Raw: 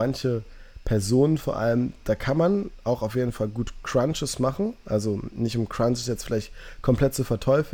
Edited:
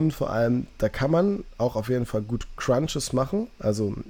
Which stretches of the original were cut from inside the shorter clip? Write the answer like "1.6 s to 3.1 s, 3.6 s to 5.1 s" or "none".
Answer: none